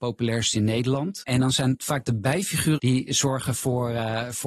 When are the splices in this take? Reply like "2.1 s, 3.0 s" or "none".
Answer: 1.2 s, 2.8 s